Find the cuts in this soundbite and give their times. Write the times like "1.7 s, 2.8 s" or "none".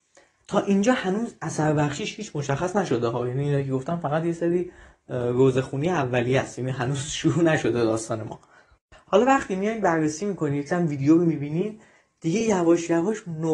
none

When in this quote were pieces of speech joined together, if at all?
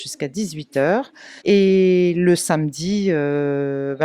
1.4 s

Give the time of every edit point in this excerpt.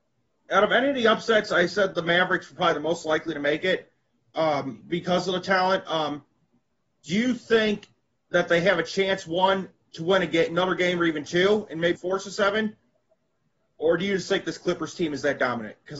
12.0 s

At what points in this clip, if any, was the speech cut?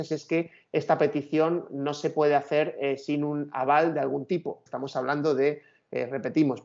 4.7 s

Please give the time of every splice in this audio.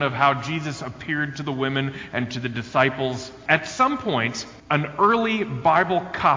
3.5 s, 4.6 s

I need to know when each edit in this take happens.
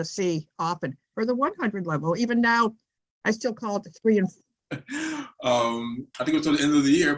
1.1 s, 4.6 s

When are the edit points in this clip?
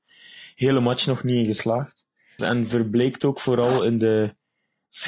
2.4 s

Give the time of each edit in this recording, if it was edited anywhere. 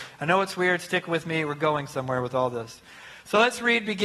none

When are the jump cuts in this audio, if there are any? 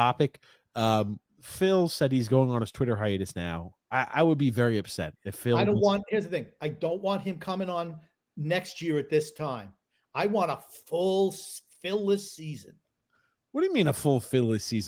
1.2 s

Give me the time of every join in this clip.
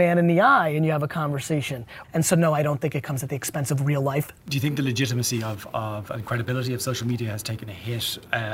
2.0 s, 4.4 s

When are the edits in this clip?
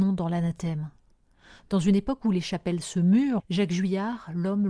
3.4 s

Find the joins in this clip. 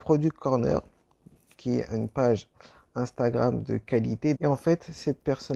4.3 s

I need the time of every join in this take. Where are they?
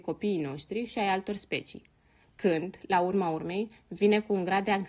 none

